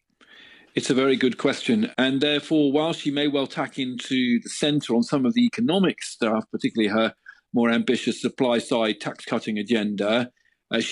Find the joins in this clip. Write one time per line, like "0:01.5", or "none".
0:01.9